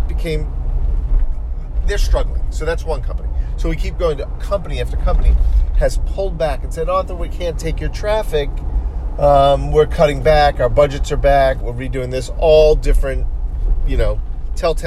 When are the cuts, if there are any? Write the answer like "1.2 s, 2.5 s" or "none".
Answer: 11.6 s